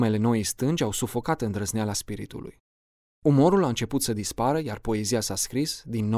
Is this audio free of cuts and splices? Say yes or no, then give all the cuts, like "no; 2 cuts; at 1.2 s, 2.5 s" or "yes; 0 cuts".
yes; 0 cuts